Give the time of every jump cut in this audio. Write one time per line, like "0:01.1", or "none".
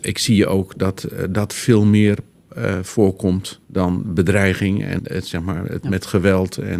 0:03.6
0:05.0